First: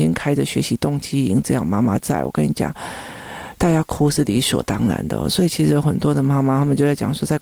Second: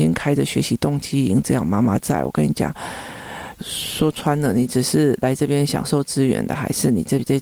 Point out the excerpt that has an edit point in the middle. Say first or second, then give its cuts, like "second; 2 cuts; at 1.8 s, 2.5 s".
second; 1 cut; at 3.6 s